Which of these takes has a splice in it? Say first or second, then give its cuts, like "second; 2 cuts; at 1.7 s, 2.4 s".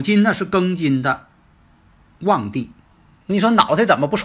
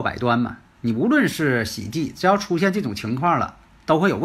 first; 1 cut; at 3.2 s